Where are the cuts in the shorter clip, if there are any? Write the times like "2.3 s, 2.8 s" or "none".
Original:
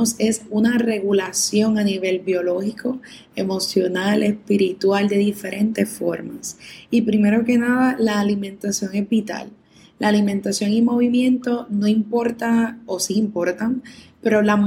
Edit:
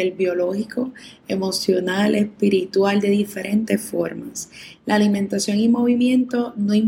4.7 s